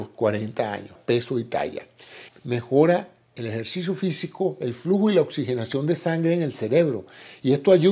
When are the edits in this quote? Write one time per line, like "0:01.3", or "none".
0:01.0
0:02.3